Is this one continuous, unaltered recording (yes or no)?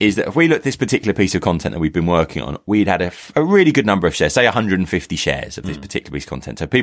yes